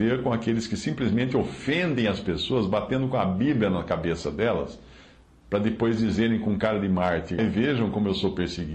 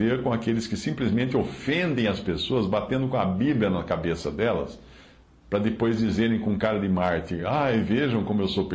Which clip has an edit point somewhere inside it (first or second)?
first